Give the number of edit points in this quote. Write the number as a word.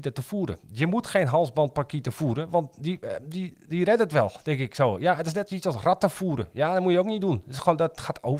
zero